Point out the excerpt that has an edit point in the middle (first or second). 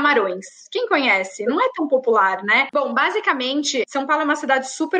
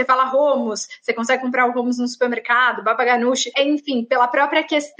first